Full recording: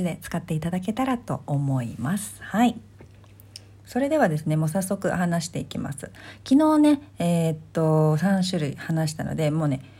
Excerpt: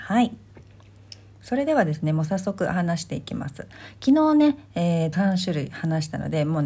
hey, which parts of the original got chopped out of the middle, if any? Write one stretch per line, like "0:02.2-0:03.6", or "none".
0:07.6-0:08.2